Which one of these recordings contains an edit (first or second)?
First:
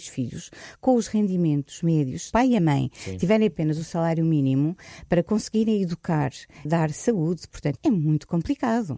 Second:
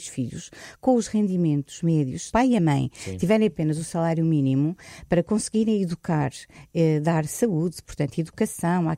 first